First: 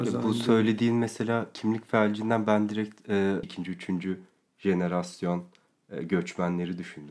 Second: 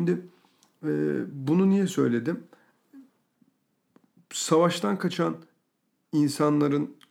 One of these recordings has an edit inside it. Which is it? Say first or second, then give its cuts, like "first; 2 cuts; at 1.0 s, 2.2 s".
first; 1 cut; at 3.4 s